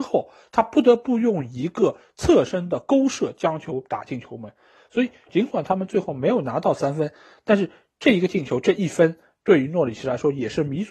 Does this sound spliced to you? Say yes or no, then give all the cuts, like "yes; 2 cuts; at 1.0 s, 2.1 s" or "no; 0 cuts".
yes; 1 cut; at 5.3 s